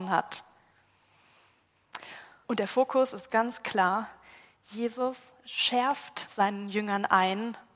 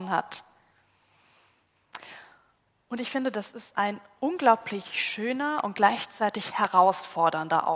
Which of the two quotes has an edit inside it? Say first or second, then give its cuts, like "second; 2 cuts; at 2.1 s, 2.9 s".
first; 1 cut; at 2.4 s